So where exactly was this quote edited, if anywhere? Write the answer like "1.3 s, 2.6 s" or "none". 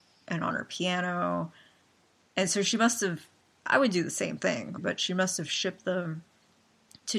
4.8 s